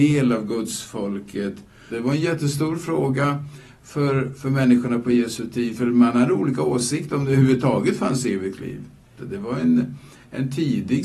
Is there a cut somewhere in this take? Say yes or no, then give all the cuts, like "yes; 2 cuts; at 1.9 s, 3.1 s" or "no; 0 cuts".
yes; 2 cuts; at 1.9 s, 9.2 s